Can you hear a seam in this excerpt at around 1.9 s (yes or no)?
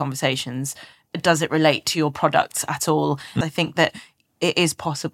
no